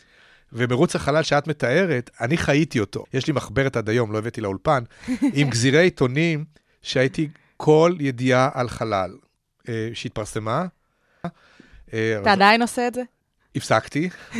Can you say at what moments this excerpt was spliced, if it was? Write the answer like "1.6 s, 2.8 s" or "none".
3.0 s, 11.2 s